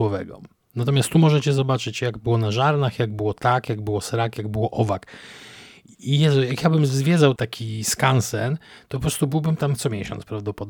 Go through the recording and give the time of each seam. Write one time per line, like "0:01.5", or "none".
0:07.4